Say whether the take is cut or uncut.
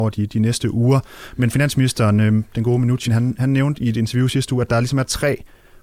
uncut